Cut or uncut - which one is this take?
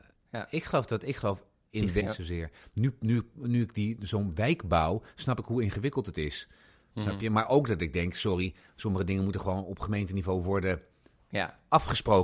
cut